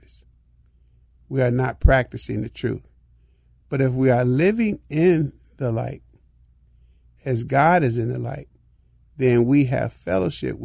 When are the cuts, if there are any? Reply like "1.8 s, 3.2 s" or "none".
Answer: none